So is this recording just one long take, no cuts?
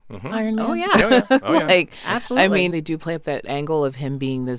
no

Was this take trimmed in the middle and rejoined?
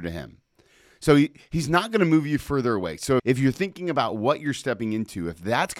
yes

